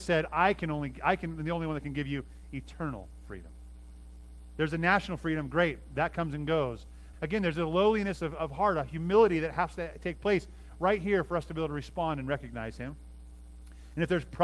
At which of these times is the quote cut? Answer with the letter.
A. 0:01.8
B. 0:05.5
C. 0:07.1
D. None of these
C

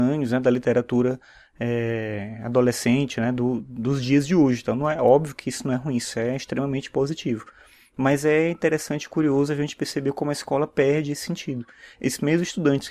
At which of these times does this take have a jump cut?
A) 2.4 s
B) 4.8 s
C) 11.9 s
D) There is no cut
D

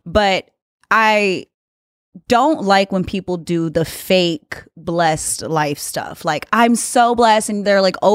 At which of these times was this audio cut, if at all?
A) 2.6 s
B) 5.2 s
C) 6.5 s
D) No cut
D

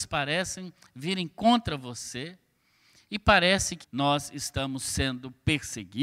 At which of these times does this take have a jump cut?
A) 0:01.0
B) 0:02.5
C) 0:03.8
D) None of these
C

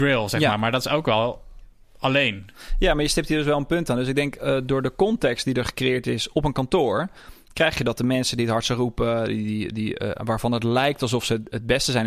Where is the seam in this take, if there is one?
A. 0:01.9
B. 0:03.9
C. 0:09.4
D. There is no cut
D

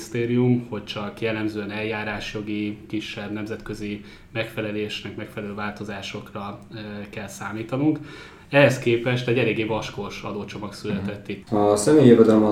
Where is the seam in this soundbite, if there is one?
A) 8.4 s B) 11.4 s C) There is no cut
B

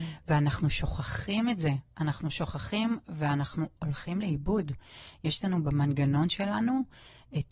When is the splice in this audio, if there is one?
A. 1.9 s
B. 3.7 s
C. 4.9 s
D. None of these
D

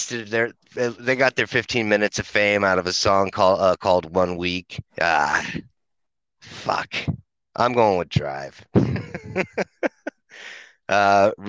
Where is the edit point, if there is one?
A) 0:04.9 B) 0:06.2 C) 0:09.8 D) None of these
A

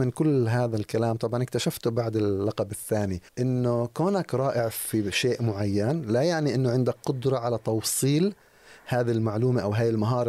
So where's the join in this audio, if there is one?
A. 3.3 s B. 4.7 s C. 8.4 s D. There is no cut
A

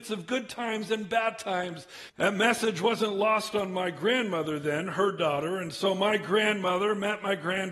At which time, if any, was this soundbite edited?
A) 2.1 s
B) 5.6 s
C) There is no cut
A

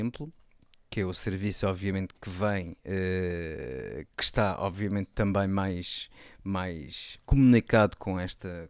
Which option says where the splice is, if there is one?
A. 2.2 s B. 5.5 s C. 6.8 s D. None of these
A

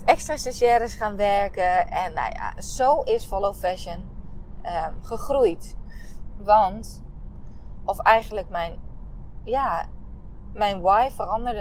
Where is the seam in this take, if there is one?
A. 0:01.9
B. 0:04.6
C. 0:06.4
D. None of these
C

